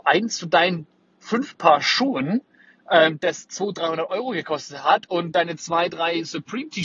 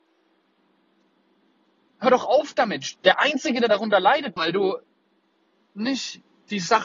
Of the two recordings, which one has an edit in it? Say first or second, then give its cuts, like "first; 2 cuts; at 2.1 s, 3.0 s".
second; 2 cuts; at 2.9 s, 4.4 s